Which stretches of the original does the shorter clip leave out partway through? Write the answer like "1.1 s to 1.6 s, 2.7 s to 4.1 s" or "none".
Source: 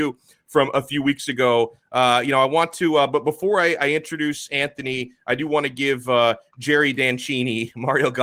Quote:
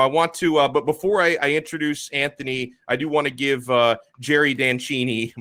none